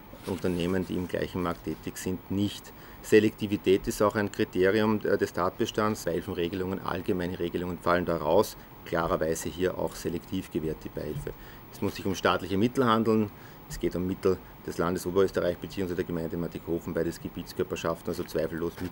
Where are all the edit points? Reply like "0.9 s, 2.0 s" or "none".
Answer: 6.0 s, 7.8 s